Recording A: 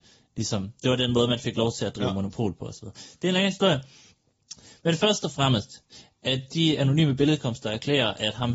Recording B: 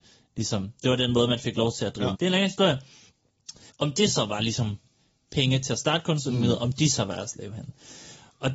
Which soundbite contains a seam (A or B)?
B